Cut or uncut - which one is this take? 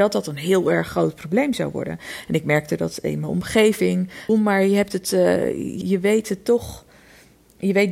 cut